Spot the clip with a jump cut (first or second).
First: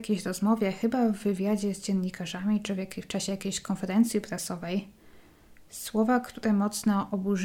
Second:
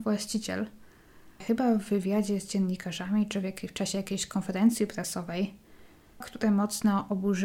second